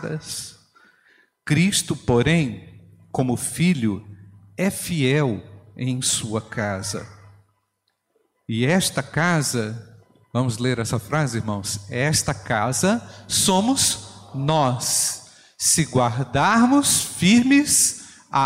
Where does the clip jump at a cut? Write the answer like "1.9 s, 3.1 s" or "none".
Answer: none